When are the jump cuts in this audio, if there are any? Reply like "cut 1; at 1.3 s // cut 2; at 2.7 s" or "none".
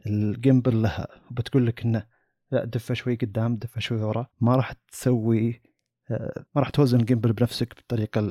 cut 1; at 4.3 s // cut 2; at 6.5 s